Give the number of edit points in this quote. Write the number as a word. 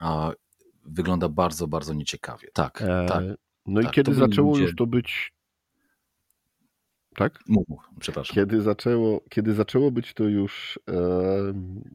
two